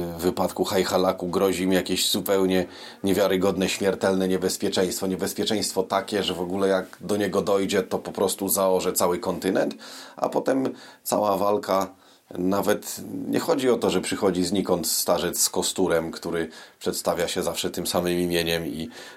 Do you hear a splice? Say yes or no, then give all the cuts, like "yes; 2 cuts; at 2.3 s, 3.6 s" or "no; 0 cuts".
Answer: no; 0 cuts